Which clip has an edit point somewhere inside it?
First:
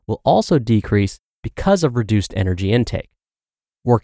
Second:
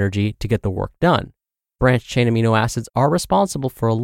second; 1 cut; at 1.8 s

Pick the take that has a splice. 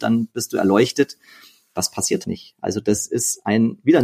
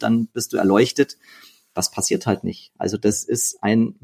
first; 1 cut; at 2.2 s

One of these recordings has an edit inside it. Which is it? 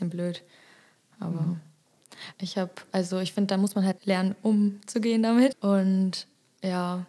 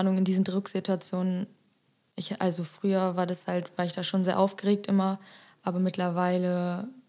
first; 2 cuts; at 2.3 s, 5.5 s

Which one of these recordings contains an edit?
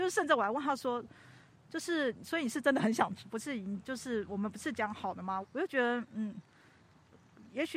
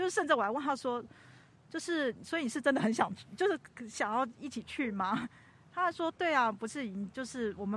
first; 2 cuts; at 3.2 s, 5.4 s

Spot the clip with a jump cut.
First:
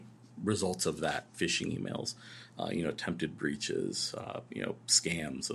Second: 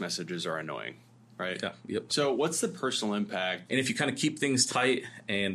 second; 2 cuts; at 2.1 s, 3.7 s

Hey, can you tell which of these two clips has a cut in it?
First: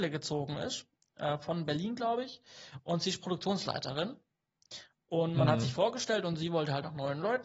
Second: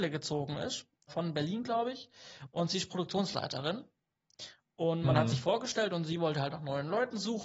second; 1 cut; at 1.1 s

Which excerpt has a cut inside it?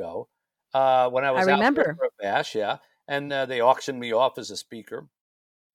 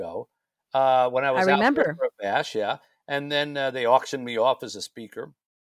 first; 1 cut; at 3.3 s

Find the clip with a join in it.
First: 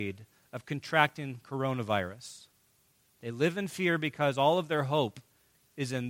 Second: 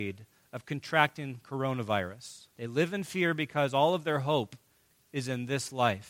second; 1 cut; at 2.5 s

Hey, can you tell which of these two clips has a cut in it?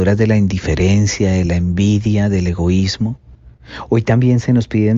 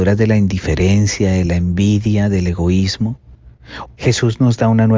second; 1 cut; at 3.9 s

